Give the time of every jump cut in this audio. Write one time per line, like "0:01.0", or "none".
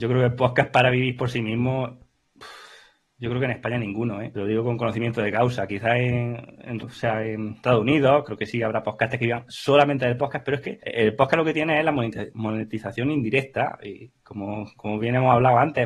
0:06.8